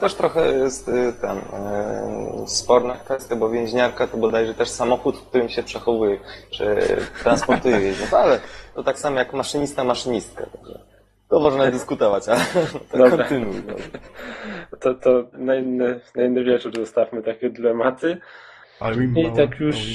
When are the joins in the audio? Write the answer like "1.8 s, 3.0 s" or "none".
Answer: 15.3 s, 18.6 s